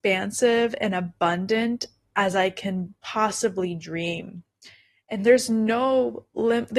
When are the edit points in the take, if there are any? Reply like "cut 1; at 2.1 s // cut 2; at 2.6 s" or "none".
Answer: none